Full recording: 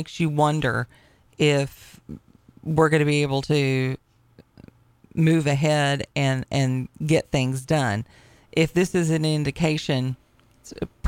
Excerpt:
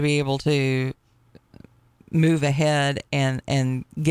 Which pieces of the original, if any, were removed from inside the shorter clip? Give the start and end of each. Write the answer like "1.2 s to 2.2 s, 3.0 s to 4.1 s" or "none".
none